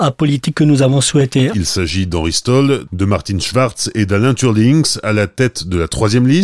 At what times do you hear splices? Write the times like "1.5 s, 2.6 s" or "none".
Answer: 1.5 s